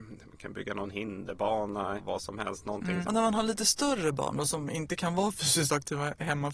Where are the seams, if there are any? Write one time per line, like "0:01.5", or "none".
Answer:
0:02.0
0:03.0